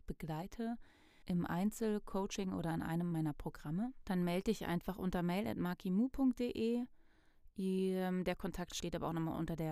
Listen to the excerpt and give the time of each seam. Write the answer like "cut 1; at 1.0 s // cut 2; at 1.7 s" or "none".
none